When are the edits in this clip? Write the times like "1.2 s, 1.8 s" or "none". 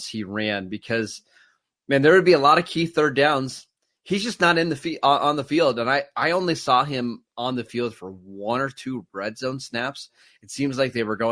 none